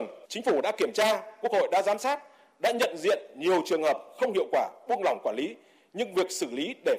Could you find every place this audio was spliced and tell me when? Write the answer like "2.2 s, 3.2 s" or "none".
none